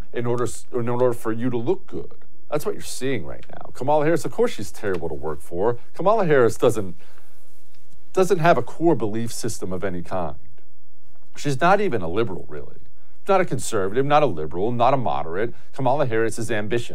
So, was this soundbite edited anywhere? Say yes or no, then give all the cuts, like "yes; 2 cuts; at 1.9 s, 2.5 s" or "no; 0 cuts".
no; 0 cuts